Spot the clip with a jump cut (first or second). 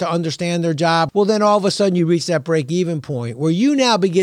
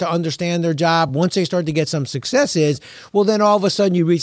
first